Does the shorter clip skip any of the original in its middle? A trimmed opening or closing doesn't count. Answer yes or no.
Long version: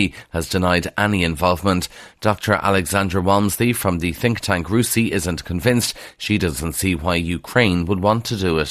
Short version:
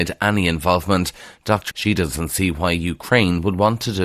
yes